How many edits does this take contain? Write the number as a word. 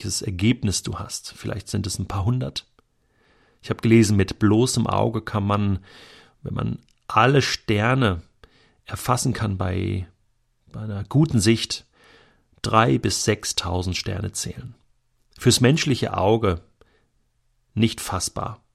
zero